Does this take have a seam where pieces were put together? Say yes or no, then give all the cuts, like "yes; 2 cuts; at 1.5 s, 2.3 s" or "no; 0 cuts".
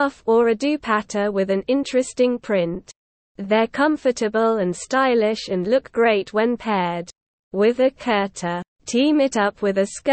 yes; 2 cuts; at 3.2 s, 8.7 s